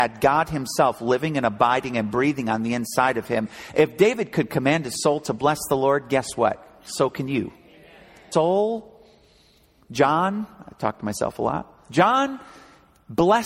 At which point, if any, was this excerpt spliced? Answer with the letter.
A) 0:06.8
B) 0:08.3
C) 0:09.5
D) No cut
B